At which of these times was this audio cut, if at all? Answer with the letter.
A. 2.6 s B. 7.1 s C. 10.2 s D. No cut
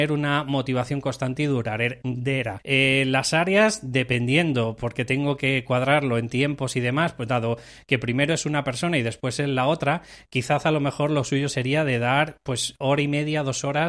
A